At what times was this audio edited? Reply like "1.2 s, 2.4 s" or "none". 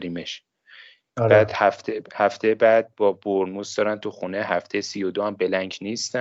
none